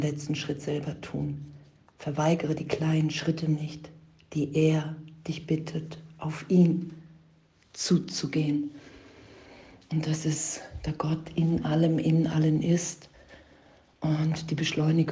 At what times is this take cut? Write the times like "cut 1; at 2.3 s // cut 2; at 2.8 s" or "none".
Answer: none